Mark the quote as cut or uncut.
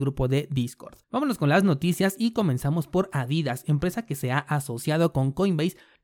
cut